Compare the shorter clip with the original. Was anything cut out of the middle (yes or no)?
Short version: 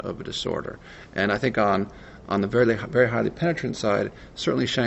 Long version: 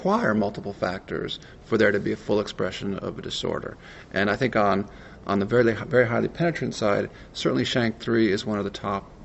no